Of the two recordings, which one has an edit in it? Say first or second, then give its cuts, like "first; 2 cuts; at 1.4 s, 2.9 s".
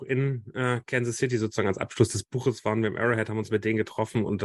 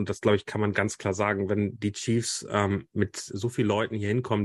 second; 1 cut; at 3.3 s